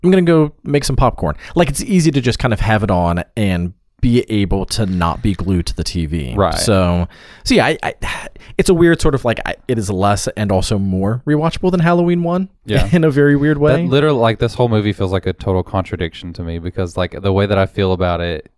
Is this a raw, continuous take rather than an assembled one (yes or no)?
yes